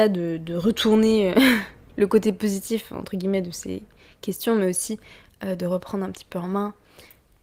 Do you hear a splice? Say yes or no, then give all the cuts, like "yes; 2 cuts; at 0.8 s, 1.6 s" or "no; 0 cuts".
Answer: no; 0 cuts